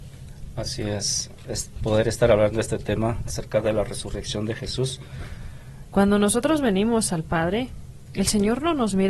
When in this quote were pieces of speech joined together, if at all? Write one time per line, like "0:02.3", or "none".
0:01.4
0:05.9